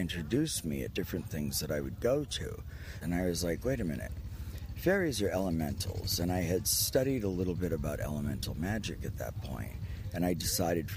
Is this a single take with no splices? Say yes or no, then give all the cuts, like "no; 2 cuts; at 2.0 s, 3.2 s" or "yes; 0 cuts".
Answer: no; 1 cut; at 3.0 s